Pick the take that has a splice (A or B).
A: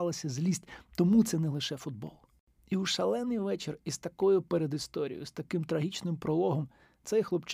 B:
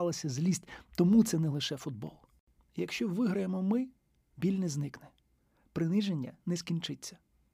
B